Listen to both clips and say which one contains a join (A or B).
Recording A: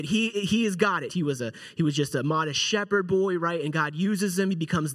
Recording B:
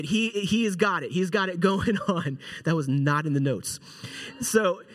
A